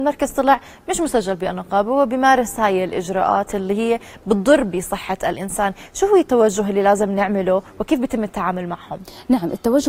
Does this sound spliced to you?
no; 0 cuts

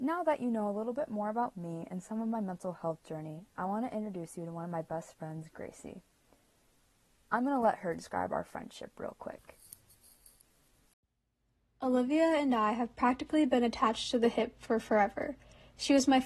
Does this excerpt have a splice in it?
no; 0 cuts

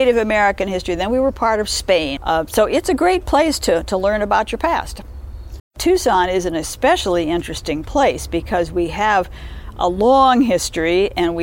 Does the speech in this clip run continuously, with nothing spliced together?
no; 2 cuts; at 2.2 s, 5.6 s

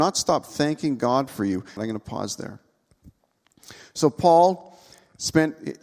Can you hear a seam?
yes; 1 cut; at 1.8 s

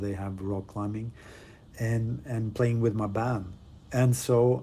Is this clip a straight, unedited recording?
no; 1 cut; at 1.7 s

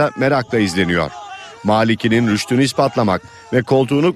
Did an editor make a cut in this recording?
no; 0 cuts

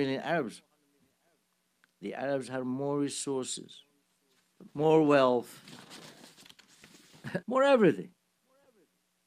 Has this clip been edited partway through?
yes; 2 cuts; at 4.7 s, 7.4 s

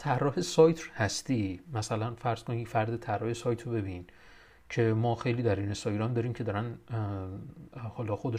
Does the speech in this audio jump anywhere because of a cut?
no; 0 cuts

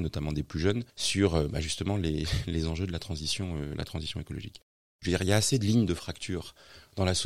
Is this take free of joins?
no; 1 cut; at 5.0 s

